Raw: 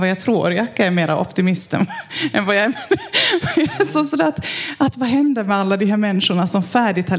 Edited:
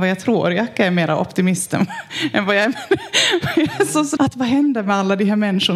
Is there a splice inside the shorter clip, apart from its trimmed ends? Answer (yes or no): yes